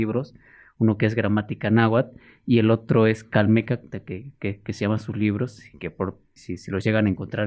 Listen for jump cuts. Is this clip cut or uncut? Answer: cut